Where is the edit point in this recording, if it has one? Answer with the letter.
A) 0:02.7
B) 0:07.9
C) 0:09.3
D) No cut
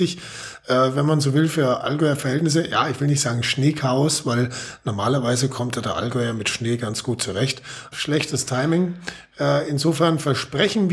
B